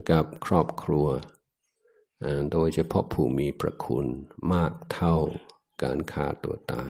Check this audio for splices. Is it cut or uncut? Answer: uncut